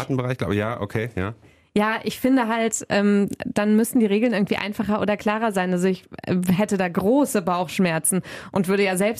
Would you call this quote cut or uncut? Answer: uncut